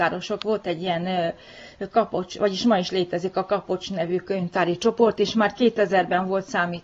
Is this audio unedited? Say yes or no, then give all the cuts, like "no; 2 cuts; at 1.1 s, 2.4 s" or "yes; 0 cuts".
yes; 0 cuts